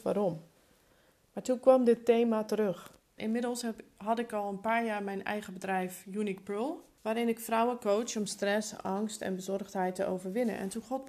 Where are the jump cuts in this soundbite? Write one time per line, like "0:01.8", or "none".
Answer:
0:03.2
0:07.0